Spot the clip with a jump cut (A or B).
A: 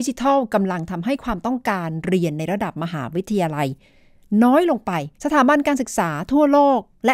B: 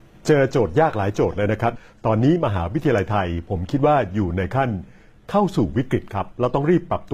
A